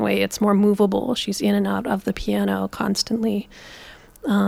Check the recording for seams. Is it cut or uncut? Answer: uncut